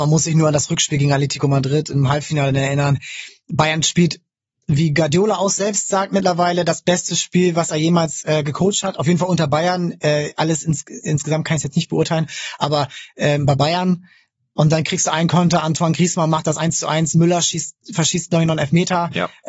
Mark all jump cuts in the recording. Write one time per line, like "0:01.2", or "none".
none